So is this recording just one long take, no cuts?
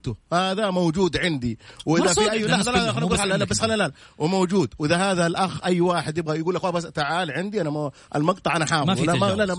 yes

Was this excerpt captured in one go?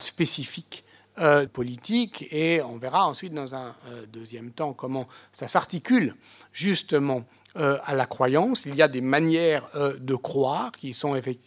no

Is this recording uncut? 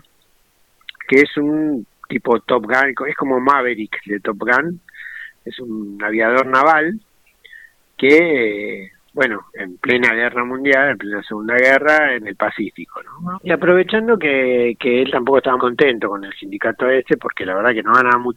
no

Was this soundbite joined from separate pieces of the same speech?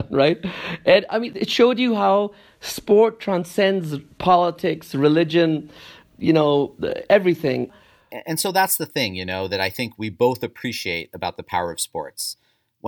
no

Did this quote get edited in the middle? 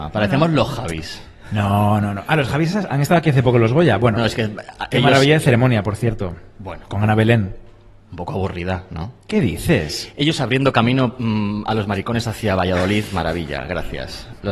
yes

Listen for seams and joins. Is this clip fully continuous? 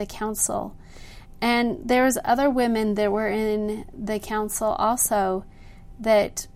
no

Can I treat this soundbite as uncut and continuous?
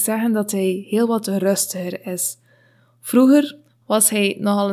no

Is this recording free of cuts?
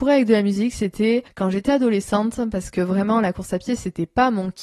yes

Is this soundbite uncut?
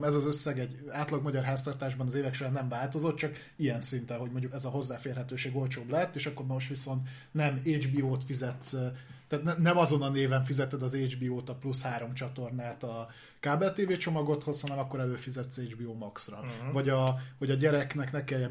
no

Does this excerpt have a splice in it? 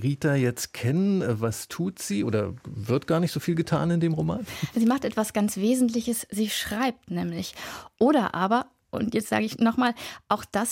yes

